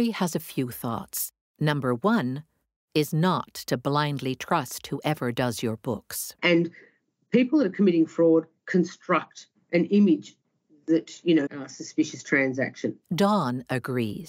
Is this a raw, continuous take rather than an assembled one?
no; 2 cuts; at 6.4 s, 11.5 s

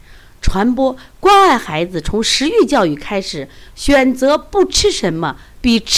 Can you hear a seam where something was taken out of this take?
no; 0 cuts

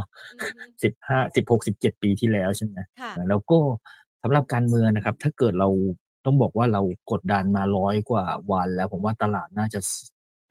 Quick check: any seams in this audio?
yes; 2 cuts; at 3.2 s, 7.2 s

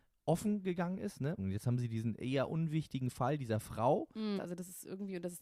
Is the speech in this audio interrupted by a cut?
yes; 2 cuts; at 1.4 s, 4.4 s

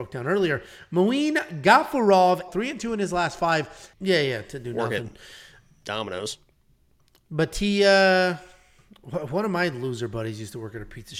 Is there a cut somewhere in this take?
yes; 2 cuts; at 2.5 s, 3.9 s

